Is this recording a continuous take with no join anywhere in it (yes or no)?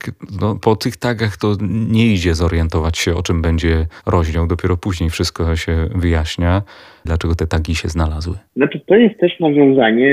no